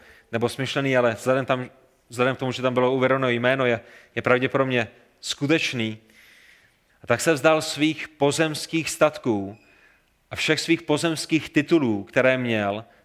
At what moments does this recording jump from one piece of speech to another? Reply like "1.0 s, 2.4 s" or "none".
6.9 s